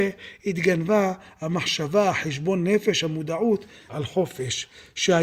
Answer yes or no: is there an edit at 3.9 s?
yes